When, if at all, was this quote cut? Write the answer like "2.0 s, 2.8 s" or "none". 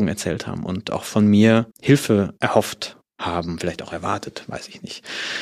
1.7 s